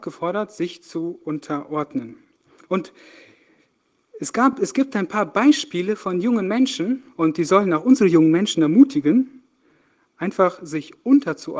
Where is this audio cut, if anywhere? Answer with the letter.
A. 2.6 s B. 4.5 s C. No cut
C